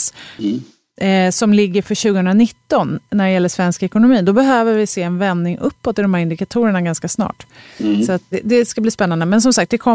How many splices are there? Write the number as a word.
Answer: one